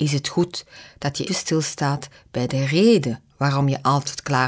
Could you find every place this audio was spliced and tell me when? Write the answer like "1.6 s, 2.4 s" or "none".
1.3 s